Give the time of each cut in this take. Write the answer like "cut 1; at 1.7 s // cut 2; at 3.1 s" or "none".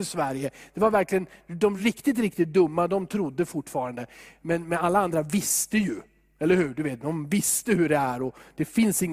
none